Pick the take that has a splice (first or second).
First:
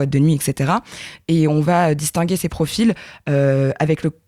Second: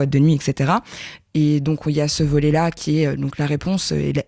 second